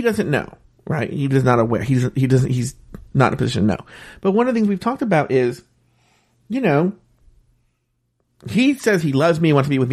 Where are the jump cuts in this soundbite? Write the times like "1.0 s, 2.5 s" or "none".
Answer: none

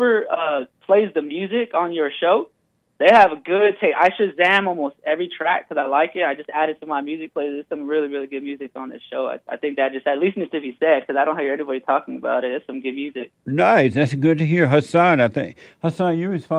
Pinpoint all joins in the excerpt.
none

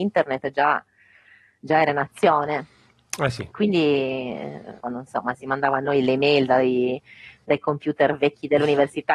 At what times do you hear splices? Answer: 3.5 s, 4.8 s

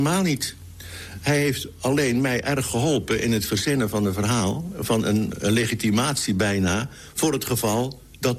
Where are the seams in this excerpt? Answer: 5.3 s

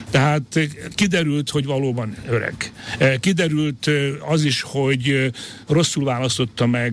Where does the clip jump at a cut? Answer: none

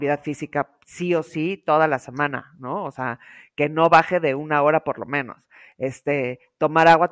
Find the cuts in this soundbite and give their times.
none

